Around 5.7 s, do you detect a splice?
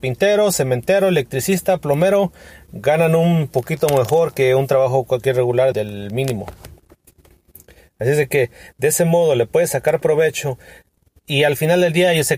yes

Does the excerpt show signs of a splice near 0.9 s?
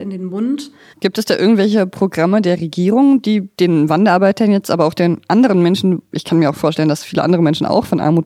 yes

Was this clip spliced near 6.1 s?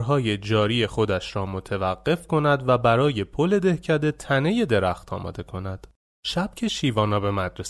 yes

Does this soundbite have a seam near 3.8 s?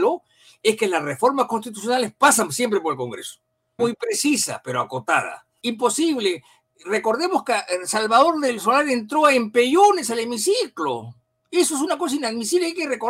yes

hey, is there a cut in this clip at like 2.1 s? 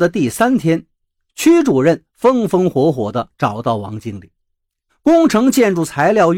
no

